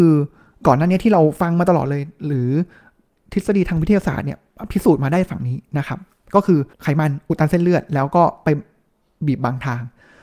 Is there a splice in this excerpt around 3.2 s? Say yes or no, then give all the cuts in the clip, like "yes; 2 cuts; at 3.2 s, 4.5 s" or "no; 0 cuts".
no; 1 cut; at 6.7 s